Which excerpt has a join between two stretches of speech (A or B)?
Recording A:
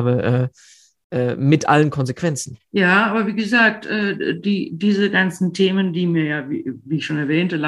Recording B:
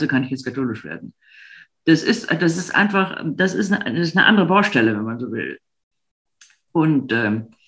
A